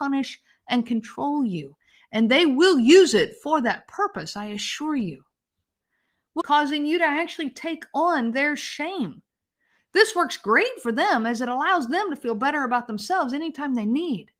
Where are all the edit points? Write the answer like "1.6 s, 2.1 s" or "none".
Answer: 6.4 s